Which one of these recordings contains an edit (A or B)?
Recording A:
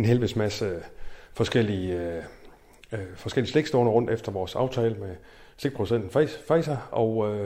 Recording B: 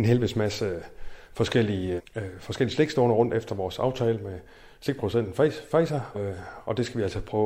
B